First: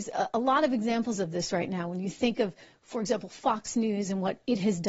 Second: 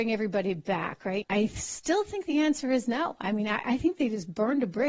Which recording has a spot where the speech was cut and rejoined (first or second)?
second